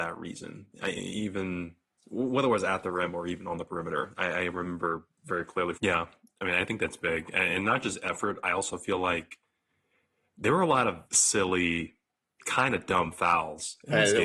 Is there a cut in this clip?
yes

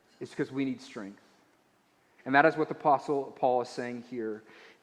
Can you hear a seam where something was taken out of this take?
yes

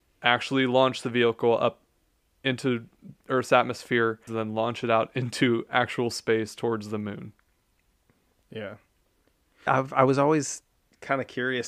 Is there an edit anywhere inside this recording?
yes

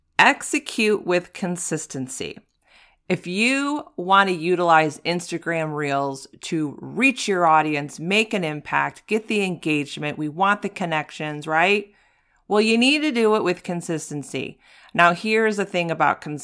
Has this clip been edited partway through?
no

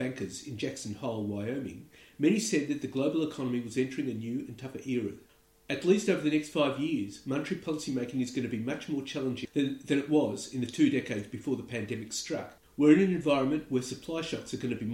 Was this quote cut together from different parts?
yes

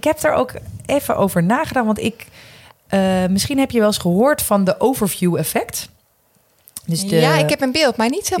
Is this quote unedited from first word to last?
yes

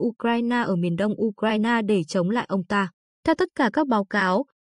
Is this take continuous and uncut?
no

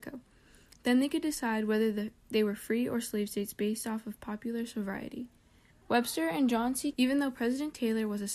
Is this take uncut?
no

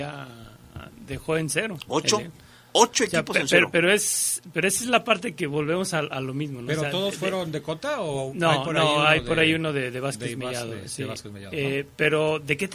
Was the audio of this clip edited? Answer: no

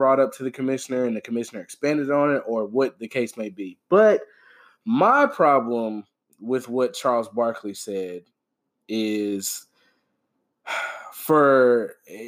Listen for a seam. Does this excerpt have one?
no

